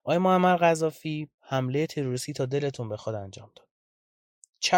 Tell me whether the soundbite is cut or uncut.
uncut